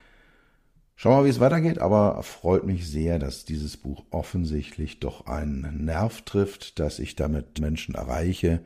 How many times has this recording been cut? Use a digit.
1